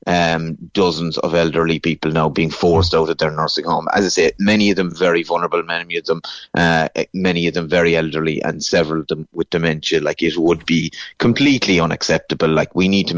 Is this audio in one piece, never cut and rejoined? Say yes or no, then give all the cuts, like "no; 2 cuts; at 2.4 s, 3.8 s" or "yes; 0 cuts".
yes; 0 cuts